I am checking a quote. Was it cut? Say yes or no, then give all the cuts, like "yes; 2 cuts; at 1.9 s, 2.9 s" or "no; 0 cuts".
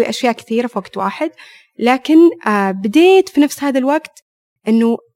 no; 0 cuts